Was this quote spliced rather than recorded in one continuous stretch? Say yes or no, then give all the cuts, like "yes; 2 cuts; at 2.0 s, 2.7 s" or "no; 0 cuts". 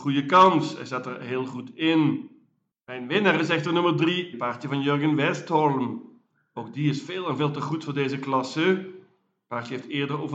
yes; 1 cut; at 4.3 s